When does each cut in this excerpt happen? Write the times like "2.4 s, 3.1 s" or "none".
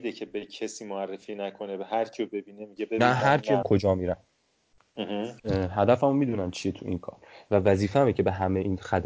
3.6 s, 5.4 s